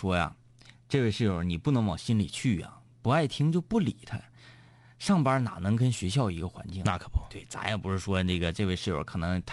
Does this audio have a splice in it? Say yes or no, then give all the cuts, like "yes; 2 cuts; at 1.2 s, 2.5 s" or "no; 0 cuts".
no; 0 cuts